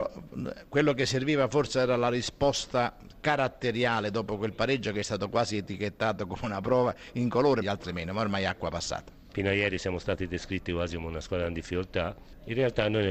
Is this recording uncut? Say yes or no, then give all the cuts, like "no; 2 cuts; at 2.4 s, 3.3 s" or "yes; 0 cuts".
no; 2 cuts; at 7.6 s, 9.3 s